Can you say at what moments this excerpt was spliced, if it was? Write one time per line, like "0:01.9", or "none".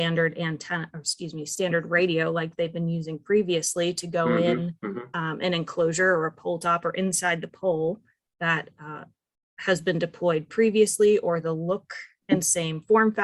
none